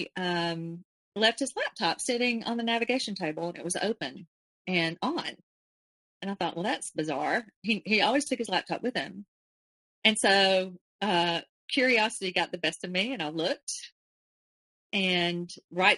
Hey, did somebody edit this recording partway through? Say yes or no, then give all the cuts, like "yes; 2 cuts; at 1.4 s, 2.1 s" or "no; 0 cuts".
no; 0 cuts